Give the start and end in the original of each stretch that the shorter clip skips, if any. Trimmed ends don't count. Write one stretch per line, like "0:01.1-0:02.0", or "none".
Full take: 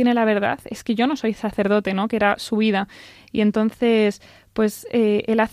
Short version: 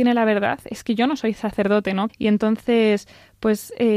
0:02.1-0:03.2